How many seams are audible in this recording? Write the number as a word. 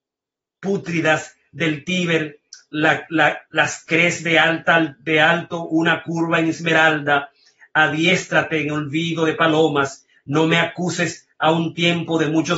zero